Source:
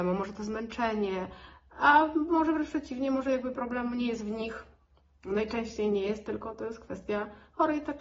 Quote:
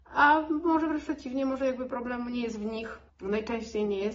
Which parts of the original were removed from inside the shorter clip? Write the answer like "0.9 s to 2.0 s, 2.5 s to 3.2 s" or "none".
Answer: 4.7 s to 5.1 s

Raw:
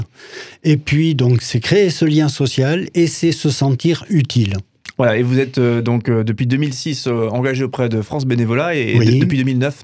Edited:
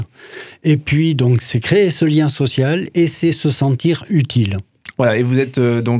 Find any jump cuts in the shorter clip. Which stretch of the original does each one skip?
none

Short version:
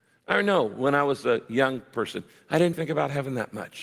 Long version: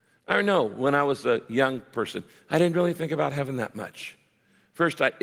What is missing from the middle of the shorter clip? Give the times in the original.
2.7 s to 3.0 s

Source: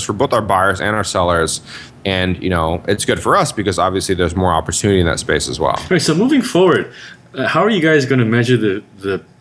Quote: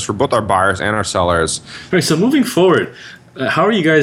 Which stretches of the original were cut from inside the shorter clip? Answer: 1.9 s to 5.9 s

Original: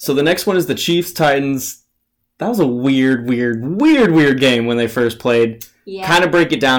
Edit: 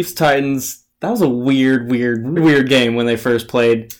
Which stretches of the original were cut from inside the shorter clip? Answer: 1.9 s to 2.3 s, 3.7 s to 4.1 s

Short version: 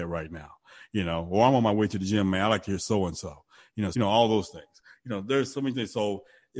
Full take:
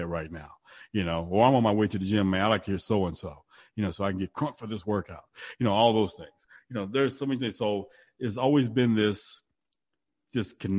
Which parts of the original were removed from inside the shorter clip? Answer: 3.9 s to 5.6 s

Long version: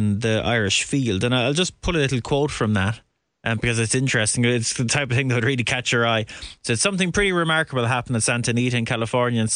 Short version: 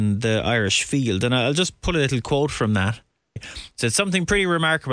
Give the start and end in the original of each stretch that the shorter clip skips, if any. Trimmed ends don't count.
3.4 s to 6.2 s

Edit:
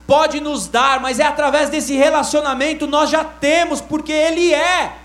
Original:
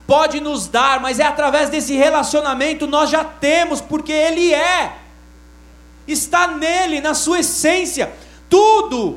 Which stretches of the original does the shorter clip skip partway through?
none

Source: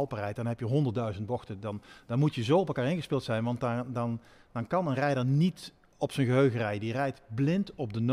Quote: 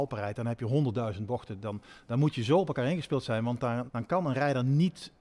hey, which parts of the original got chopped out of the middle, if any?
3.9 s to 4.5 s

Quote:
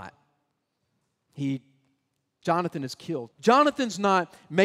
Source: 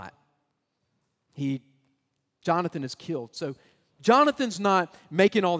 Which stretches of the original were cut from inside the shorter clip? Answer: 3.3 s to 3.9 s

